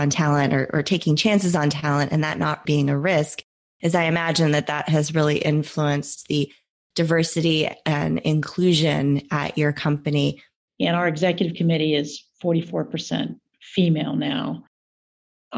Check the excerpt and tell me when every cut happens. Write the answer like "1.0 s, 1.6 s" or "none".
2.6 s, 10.7 s